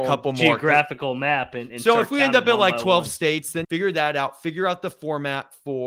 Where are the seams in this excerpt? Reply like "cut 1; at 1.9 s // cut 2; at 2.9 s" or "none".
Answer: cut 1; at 3.6 s